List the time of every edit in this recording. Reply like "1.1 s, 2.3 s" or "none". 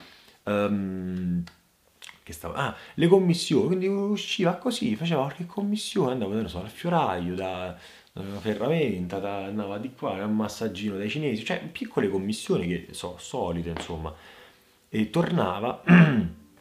none